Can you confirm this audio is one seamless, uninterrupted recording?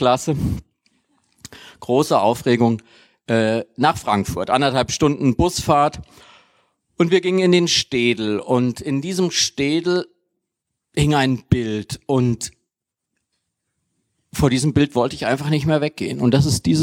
yes; 0 cuts

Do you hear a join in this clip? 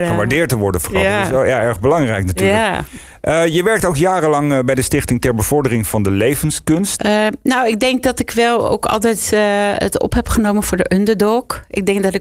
yes; 1 cut; at 7.0 s

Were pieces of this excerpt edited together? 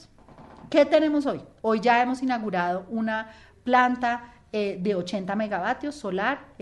no; 0 cuts

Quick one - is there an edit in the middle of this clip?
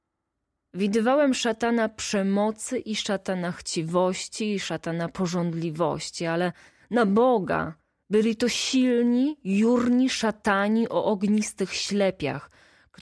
no; 0 cuts

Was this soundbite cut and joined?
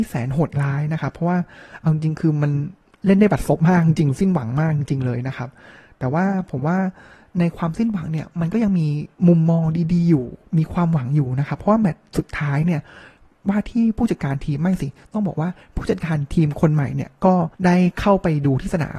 yes; 2 cuts; at 9.1 s, 17.5 s

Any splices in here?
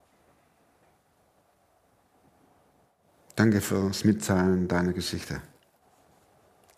no; 0 cuts

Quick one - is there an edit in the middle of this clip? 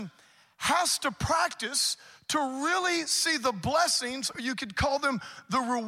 no; 0 cuts

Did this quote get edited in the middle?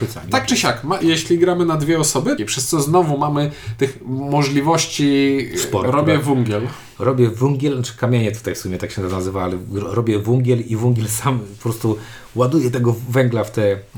yes; 3 cuts; at 1.0 s, 2.4 s, 5.8 s

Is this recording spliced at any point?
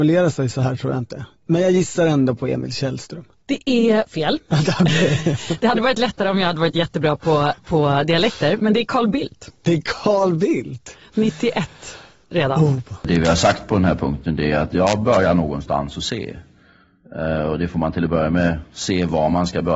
no; 0 cuts

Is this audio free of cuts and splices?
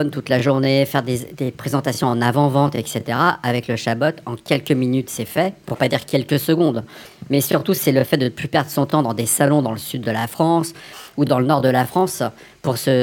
yes; 0 cuts

